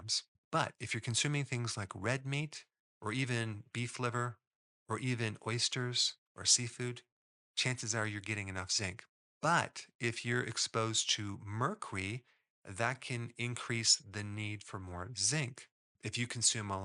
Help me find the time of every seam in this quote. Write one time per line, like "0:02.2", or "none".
none